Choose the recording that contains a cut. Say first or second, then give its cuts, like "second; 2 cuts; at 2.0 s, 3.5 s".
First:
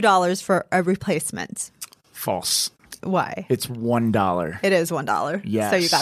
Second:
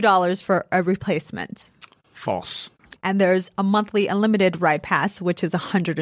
second; 1 cut; at 3.0 s